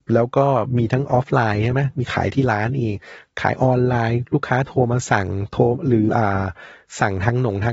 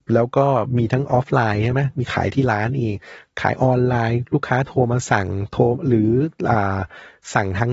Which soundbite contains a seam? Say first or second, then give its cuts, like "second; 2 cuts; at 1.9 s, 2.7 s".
first; 1 cut; at 6.1 s